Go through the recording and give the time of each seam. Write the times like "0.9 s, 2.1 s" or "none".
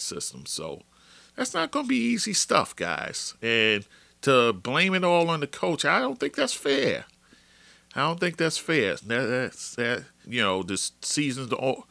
9.0 s, 10.2 s